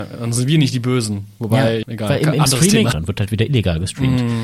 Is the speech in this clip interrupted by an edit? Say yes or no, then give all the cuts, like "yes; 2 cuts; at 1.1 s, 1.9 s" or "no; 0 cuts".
yes; 2 cuts; at 1.8 s, 2.9 s